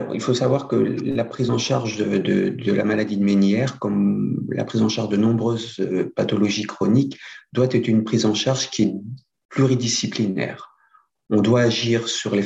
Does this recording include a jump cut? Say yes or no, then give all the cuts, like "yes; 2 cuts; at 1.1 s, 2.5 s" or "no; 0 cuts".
no; 0 cuts